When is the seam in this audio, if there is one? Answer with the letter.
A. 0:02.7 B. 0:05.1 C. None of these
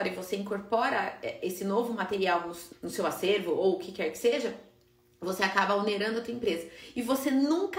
A